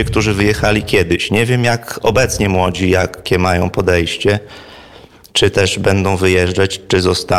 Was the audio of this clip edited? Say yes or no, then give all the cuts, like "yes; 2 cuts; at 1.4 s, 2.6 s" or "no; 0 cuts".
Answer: no; 0 cuts